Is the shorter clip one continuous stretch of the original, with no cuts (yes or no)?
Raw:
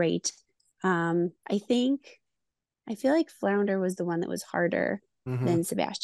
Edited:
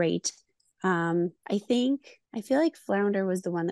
no